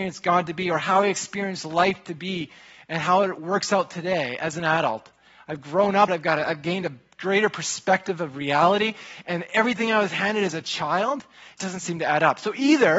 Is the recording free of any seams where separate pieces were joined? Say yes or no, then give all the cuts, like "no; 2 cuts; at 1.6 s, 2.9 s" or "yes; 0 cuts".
no; 2 cuts; at 6.1 s, 11.6 s